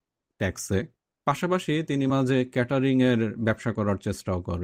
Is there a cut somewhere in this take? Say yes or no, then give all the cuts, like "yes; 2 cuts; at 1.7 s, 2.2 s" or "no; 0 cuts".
yes; 1 cut; at 2.1 s